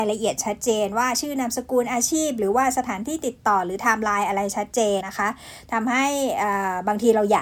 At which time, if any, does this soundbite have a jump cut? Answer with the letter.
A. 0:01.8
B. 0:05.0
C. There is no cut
B